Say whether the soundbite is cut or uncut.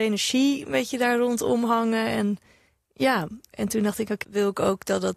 cut